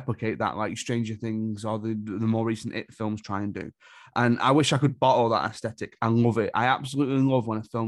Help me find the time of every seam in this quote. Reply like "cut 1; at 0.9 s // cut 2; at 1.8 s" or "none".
none